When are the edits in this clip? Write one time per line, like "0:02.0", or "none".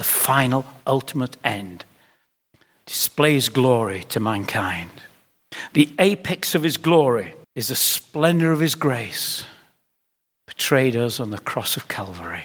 0:07.4

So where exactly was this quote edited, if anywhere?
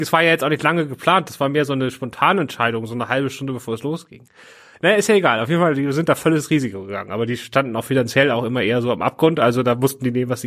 none

